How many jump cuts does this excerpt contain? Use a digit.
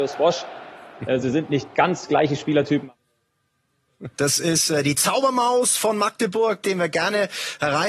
2